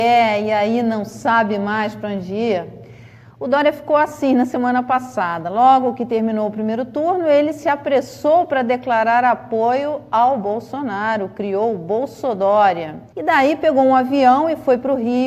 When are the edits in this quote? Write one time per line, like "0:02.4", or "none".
0:13.1